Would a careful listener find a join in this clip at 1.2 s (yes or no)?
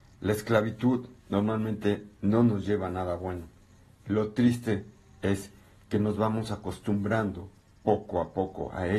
yes